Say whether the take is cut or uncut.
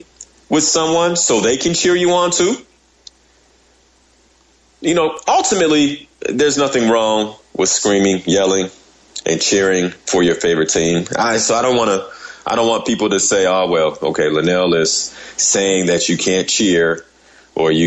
uncut